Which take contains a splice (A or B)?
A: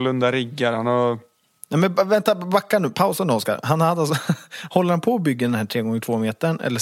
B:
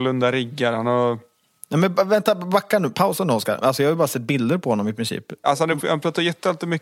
B